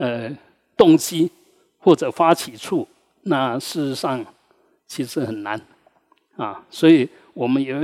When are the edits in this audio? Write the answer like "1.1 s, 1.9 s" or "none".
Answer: none